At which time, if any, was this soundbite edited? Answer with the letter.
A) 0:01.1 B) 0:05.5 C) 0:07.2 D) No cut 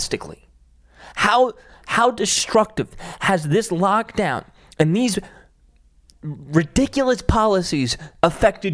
A